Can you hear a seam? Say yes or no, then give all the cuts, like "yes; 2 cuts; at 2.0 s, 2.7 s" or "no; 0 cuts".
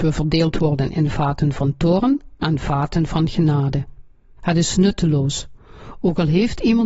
yes; 1 cut; at 4.4 s